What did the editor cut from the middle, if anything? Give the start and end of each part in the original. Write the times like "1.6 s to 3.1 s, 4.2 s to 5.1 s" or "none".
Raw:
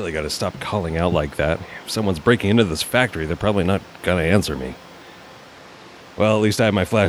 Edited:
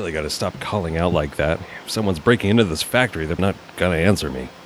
3.4 s to 3.6 s